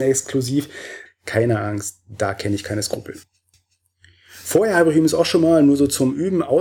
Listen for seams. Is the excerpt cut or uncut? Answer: cut